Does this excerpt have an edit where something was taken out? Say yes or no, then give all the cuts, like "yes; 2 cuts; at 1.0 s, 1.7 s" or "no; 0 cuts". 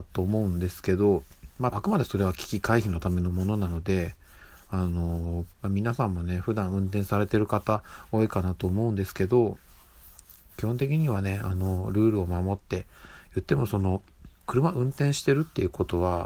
yes; 3 cuts; at 1.7 s, 5.5 s, 14.4 s